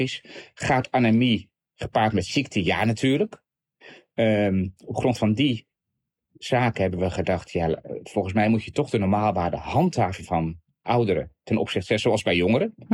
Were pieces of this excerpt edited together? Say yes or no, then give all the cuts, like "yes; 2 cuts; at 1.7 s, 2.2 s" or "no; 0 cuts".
no; 0 cuts